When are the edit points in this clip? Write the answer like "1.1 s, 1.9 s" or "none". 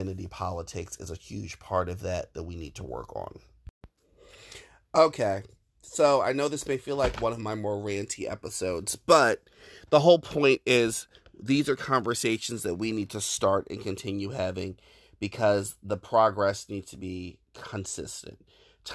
none